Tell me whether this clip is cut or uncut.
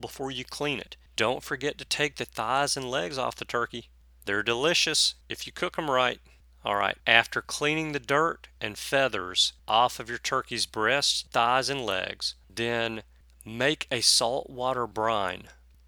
cut